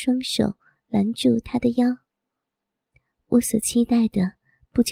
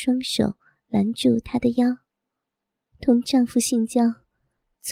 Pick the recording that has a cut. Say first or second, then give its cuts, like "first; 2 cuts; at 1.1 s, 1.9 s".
second; 1 cut; at 2.9 s